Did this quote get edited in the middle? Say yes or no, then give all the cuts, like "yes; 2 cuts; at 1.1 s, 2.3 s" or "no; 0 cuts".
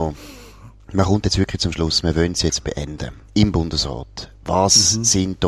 no; 0 cuts